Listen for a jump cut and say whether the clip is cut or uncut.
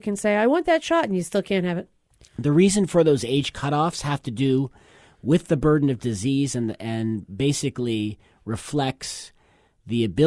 uncut